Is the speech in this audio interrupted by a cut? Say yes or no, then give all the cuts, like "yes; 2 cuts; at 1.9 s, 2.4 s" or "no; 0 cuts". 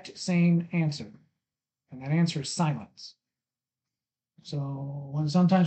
no; 0 cuts